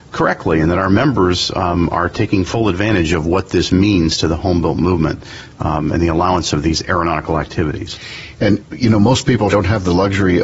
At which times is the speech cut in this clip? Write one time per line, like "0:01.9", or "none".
0:09.5